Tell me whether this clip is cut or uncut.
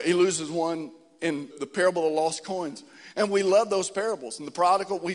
cut